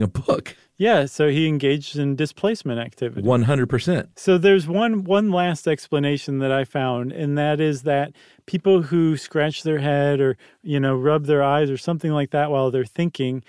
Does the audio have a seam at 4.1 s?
yes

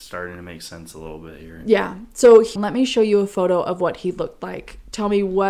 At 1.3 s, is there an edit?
no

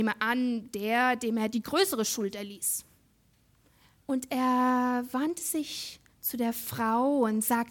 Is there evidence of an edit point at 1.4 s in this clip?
no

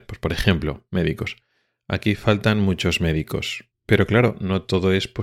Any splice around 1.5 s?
no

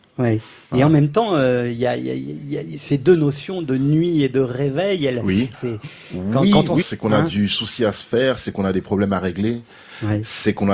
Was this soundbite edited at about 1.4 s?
no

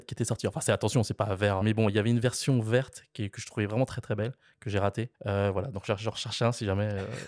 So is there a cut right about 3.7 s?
no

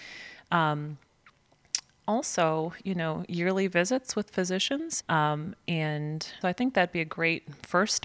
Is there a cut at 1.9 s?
no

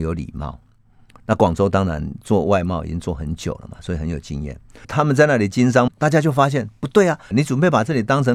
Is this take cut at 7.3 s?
yes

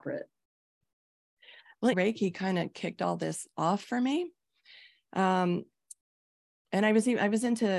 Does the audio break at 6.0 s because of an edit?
no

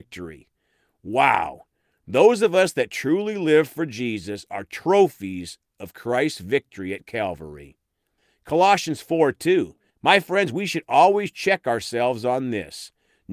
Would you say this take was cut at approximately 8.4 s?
no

